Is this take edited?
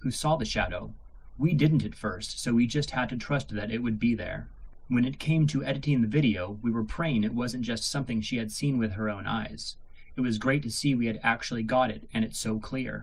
no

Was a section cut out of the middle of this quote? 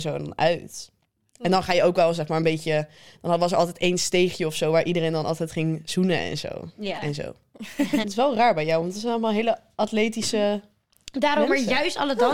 yes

